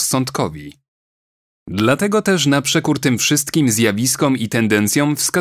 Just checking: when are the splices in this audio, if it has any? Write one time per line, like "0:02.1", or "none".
0:01.6